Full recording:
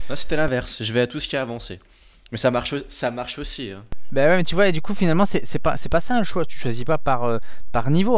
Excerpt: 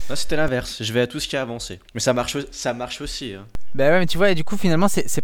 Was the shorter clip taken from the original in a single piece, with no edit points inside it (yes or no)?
no